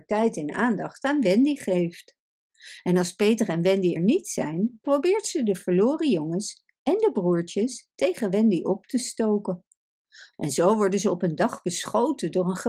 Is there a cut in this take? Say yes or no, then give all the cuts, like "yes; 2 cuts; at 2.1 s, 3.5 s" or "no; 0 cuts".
yes; 2 cuts; at 4.0 s, 10.3 s